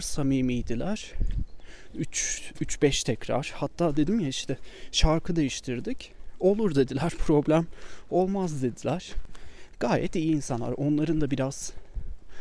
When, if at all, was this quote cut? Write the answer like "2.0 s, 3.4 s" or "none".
none